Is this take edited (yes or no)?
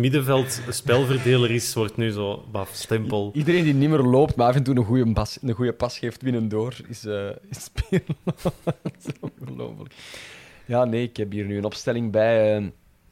no